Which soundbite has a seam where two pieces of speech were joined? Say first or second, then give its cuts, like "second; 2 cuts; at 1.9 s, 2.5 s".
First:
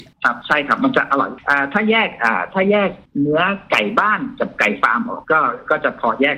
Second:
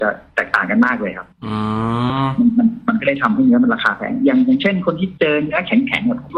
first; 1 cut; at 5.2 s